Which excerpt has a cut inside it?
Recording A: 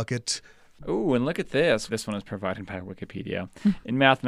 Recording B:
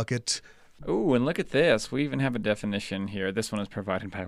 A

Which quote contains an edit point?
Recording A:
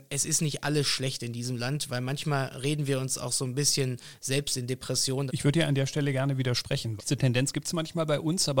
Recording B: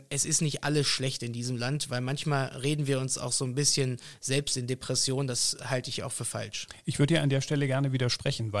A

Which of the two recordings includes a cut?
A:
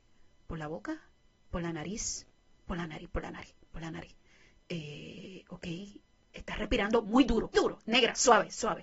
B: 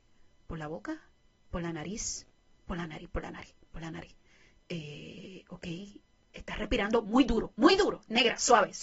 A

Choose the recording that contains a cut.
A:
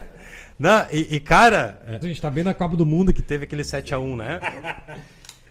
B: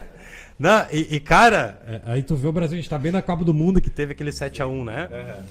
A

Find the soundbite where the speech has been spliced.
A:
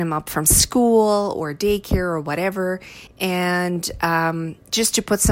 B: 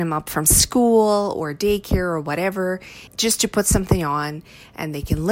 B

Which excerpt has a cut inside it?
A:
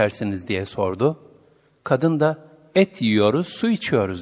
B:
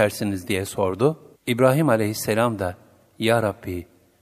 B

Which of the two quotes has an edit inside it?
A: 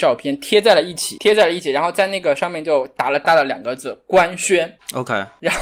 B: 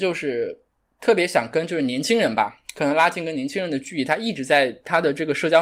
A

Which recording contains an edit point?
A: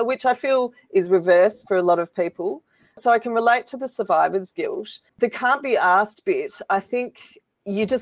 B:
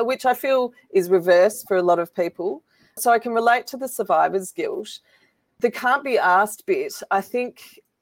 A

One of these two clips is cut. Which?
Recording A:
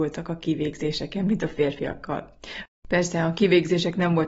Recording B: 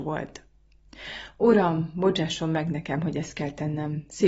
A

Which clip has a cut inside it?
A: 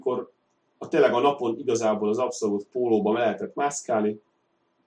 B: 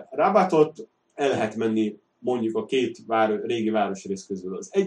B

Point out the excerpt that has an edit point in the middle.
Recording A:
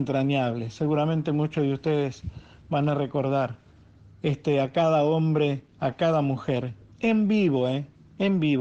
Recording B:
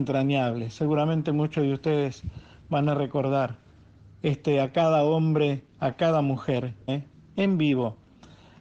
B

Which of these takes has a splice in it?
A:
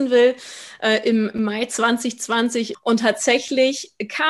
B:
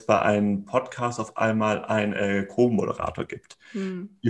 A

